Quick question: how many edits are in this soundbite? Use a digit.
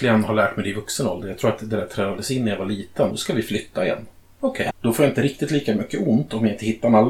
2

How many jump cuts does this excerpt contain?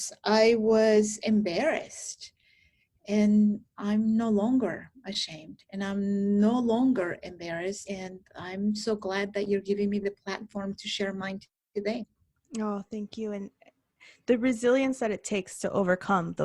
1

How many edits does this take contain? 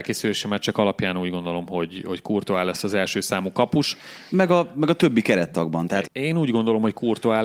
2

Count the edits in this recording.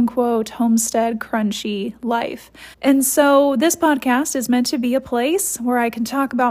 1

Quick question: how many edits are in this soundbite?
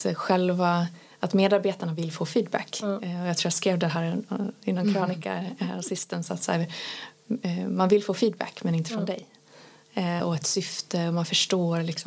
1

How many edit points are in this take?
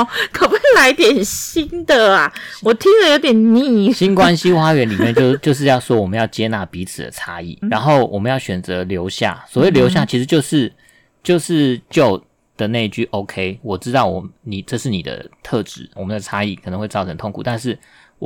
3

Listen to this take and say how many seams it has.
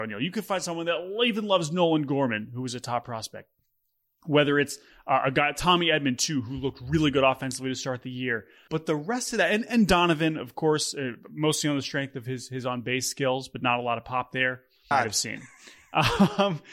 2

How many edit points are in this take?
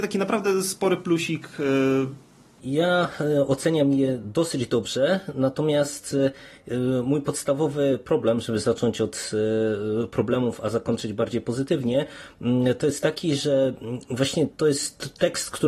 2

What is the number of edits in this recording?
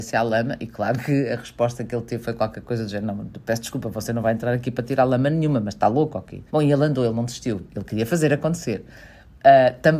2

